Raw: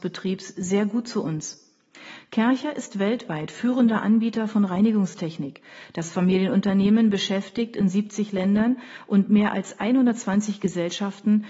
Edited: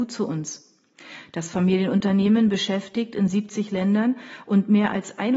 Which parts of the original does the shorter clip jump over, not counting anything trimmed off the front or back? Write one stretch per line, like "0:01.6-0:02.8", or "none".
0:02.2-0:05.9